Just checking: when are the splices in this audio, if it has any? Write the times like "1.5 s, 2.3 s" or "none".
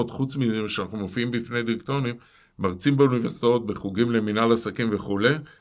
none